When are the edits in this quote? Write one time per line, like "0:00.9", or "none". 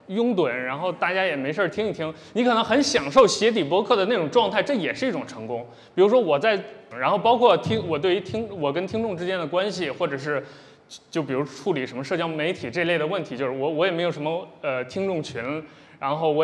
0:06.9